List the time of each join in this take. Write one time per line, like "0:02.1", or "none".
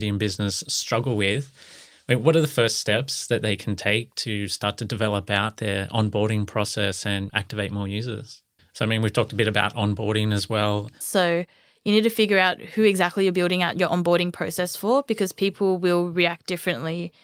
0:08.6
0:11.0